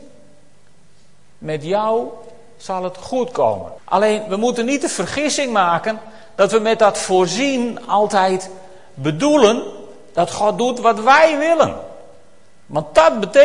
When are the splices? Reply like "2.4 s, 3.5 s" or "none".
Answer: 3.8 s